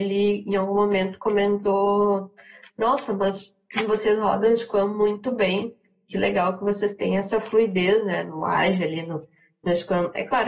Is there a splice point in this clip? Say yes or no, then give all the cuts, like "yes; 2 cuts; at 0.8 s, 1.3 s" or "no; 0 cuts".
no; 0 cuts